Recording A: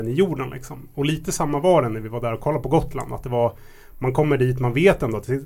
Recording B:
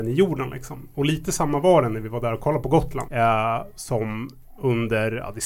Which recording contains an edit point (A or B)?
B